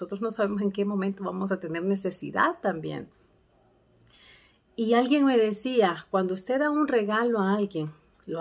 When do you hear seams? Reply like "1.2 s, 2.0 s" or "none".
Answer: none